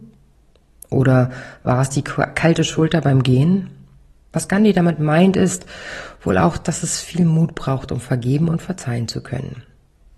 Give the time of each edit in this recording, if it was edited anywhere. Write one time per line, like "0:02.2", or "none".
0:04.2